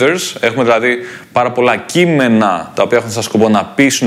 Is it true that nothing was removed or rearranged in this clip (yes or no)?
yes